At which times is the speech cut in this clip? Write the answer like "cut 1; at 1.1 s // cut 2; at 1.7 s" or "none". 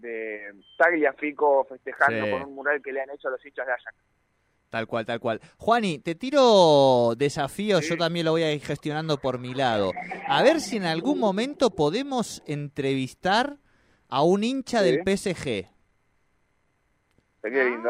none